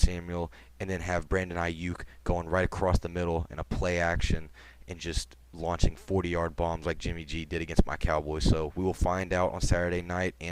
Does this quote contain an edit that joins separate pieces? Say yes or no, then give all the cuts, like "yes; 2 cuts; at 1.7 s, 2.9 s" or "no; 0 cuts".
no; 0 cuts